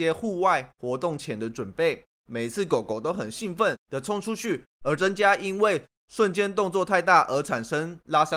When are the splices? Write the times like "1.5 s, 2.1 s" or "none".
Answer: 2.2 s